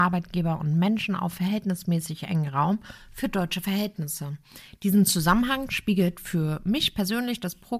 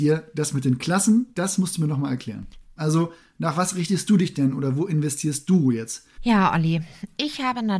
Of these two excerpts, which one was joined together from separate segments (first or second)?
second